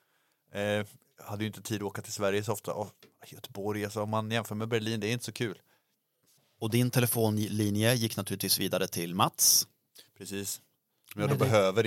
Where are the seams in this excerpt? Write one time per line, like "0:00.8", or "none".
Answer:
none